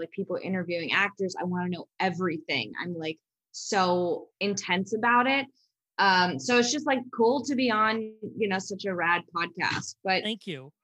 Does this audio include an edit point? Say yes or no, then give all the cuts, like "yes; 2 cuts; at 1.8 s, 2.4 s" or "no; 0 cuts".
no; 0 cuts